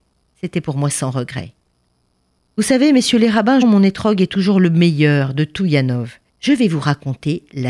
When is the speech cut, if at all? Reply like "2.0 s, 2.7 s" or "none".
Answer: 3.6 s, 6.3 s